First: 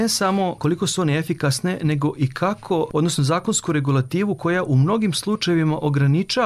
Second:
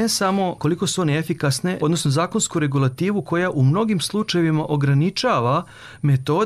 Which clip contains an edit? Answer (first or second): second